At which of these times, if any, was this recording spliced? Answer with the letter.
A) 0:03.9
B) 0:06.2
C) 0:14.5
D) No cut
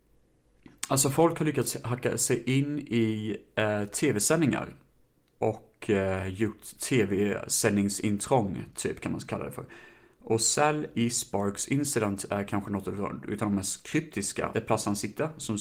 C